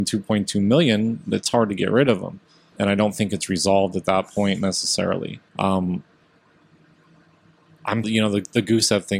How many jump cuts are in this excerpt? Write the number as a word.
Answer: three